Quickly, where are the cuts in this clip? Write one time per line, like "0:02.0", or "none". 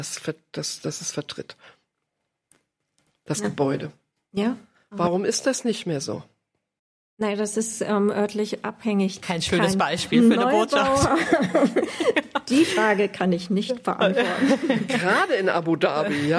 0:09.2